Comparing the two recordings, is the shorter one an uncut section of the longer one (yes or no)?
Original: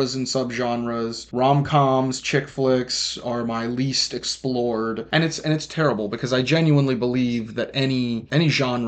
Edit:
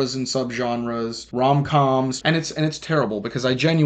no